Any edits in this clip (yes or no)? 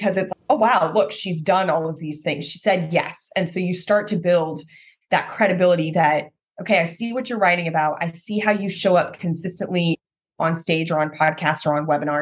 no